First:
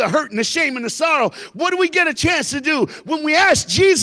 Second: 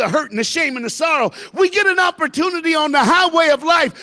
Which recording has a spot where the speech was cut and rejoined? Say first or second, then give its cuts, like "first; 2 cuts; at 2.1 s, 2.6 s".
second; 1 cut; at 1.5 s